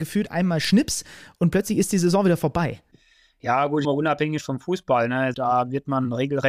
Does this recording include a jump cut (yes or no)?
yes